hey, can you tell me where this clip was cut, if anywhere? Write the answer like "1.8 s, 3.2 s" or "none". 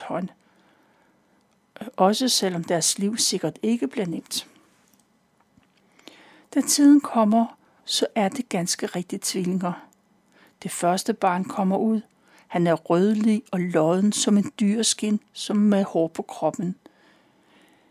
7.8 s